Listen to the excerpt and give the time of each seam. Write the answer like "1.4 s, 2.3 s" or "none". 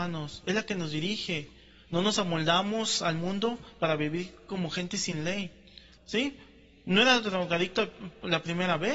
6.0 s